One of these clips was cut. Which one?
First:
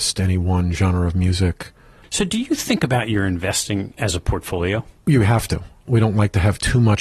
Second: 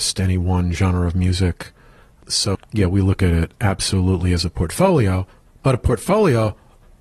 first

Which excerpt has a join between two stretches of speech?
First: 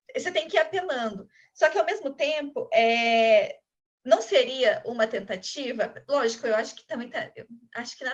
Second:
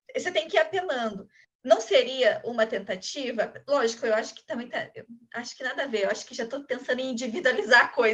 second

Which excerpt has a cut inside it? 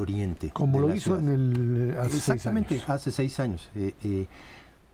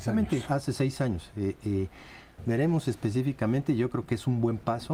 second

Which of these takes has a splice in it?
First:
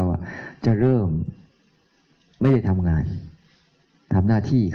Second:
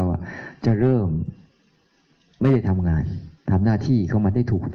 second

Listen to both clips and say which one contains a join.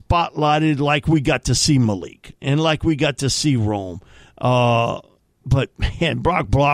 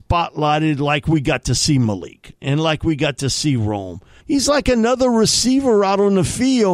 second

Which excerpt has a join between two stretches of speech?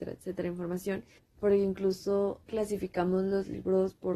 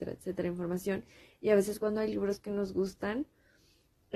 first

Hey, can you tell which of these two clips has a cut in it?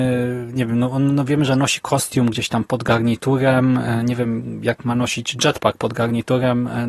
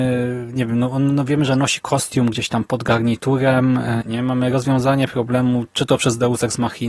second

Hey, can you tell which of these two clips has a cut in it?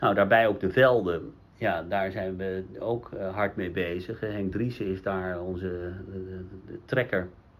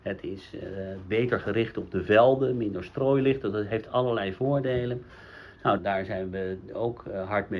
second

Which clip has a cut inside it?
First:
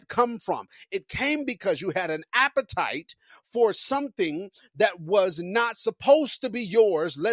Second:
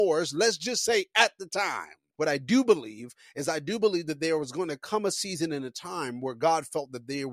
second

